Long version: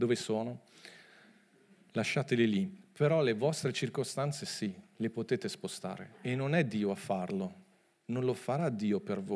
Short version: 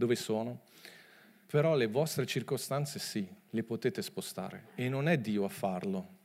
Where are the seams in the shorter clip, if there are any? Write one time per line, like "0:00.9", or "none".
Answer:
0:01.4

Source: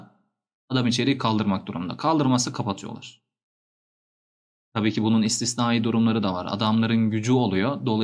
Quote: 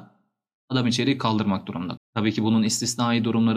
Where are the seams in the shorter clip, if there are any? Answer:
0:02.0

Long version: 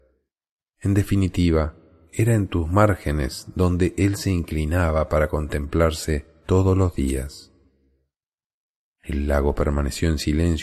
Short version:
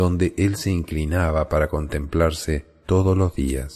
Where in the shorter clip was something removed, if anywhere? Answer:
none

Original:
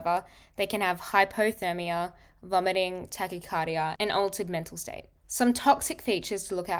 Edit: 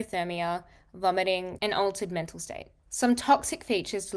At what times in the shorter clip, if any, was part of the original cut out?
0:01.6

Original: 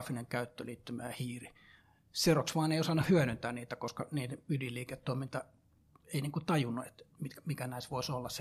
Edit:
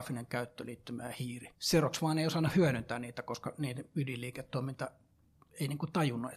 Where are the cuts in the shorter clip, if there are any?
0:01.5

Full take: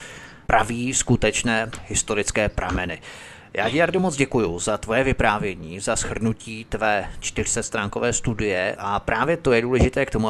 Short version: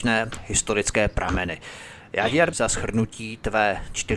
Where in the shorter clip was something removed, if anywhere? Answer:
0:02.5

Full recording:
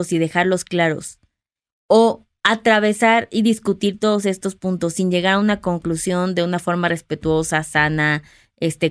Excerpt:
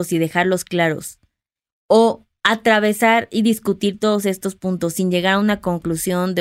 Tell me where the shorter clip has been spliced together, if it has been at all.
none

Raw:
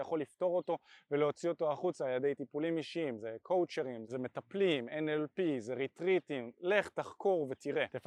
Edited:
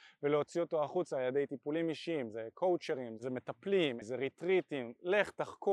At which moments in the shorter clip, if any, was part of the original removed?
0:04.0

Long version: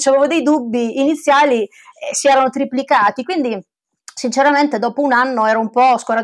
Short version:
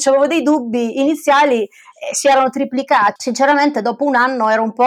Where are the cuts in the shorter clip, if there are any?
0:03.2

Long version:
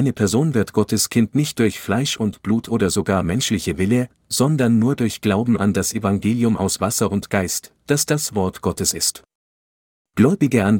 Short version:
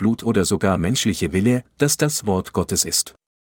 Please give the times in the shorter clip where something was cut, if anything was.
0:01.7

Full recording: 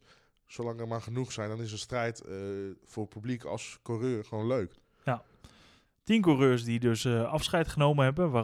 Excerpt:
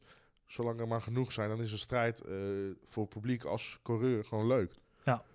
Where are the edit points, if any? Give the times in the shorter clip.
none

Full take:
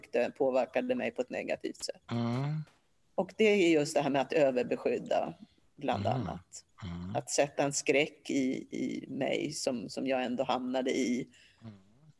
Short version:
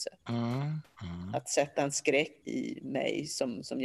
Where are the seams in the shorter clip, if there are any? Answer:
0:01.0
0:02.4

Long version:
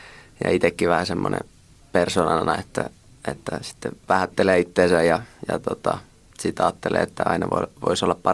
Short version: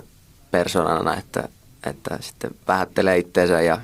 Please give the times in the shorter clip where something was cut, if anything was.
none

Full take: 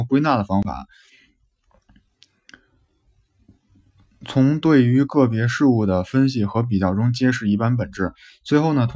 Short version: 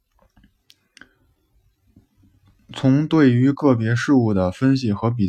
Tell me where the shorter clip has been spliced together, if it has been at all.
none

